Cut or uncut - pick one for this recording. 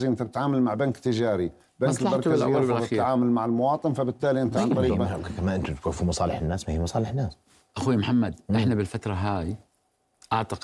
uncut